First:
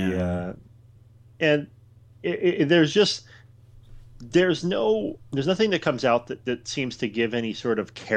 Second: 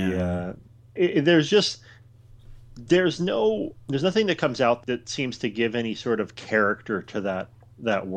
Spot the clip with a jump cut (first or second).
second